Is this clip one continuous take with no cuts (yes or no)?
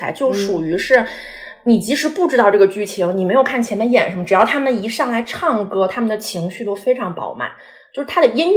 yes